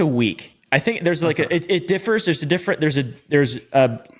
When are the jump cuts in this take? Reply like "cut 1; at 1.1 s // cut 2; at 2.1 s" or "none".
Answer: none